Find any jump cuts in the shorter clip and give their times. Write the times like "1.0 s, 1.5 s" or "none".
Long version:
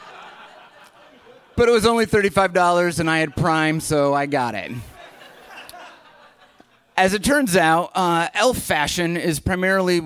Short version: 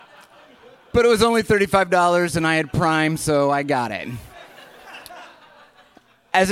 none